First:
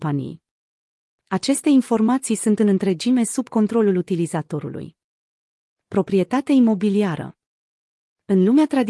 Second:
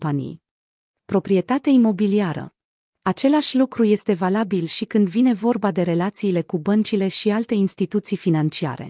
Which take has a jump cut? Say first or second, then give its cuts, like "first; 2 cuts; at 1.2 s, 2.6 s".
second; 2 cuts; at 0.9 s, 2.9 s